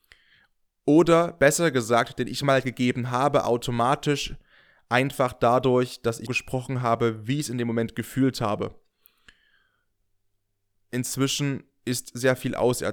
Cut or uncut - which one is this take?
cut